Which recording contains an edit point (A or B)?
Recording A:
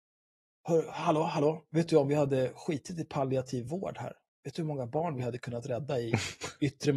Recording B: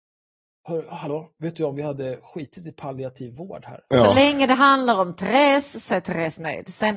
B